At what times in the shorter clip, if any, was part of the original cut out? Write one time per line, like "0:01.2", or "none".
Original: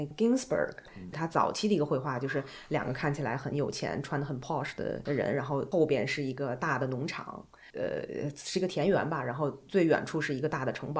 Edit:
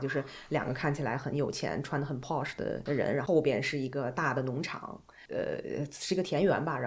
0:03.3

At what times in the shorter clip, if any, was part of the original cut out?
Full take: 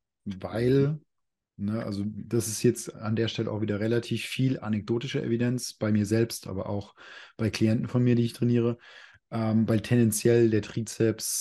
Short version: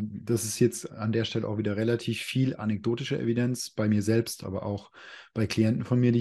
none

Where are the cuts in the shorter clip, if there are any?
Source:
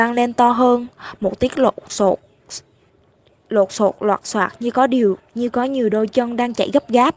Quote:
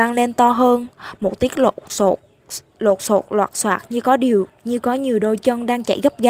0:02.7

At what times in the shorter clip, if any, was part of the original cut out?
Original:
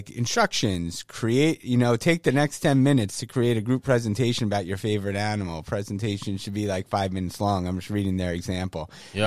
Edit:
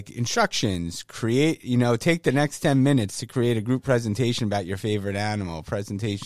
none

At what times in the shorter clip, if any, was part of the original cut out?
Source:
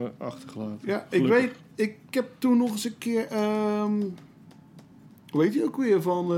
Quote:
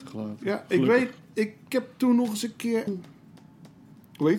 0:02.9

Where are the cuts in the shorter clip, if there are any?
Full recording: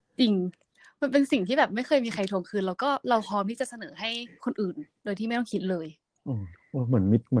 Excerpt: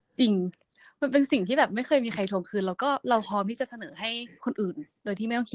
none

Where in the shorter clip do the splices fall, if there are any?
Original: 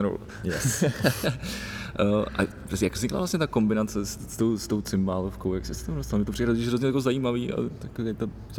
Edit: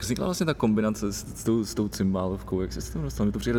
none

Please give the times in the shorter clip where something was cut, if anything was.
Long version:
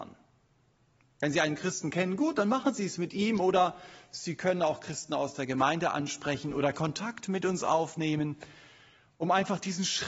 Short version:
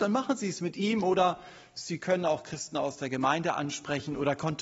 none

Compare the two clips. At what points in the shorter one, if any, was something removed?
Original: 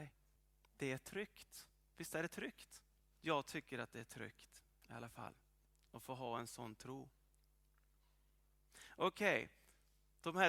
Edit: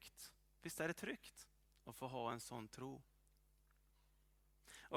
0:01.7

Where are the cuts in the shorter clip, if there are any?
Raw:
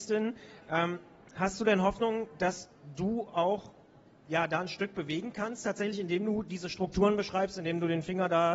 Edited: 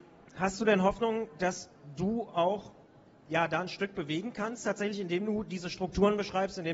none

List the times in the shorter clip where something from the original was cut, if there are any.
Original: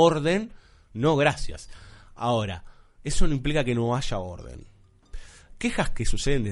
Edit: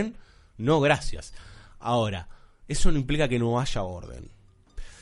none

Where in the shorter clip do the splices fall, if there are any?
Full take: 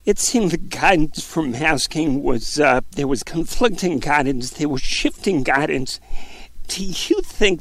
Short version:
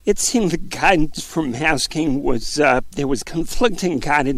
none

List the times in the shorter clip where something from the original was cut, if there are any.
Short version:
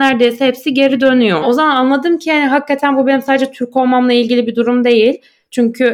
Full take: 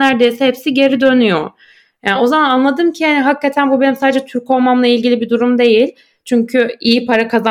0:01.4

